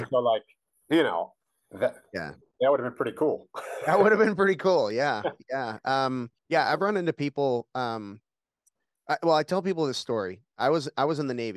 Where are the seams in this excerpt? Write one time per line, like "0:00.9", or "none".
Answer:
0:06.4